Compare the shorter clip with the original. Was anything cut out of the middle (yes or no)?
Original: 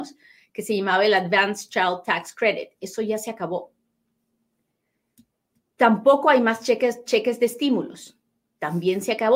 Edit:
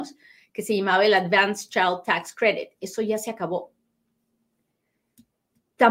no